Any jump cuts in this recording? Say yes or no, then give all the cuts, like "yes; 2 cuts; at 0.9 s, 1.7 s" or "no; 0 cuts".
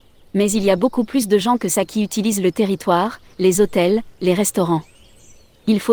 no; 0 cuts